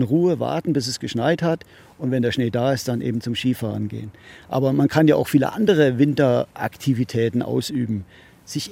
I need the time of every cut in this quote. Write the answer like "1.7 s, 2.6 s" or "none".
none